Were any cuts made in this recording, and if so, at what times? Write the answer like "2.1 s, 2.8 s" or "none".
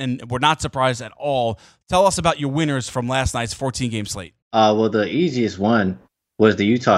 4.4 s